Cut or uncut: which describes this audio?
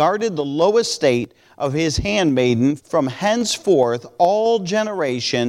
cut